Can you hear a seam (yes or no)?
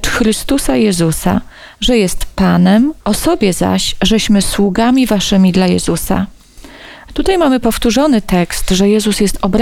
yes